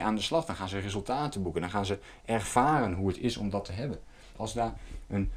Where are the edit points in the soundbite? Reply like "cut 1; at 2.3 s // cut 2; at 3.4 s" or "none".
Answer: cut 1; at 4.3 s